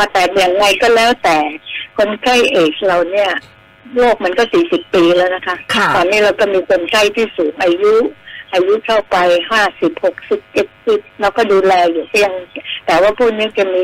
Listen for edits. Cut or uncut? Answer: cut